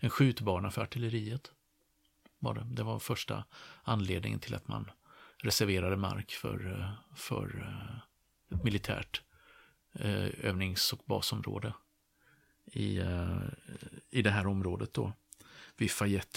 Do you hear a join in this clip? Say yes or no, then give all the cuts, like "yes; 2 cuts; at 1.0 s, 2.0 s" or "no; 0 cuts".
no; 0 cuts